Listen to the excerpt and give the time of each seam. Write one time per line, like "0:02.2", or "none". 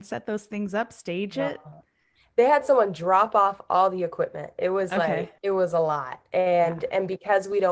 0:05.4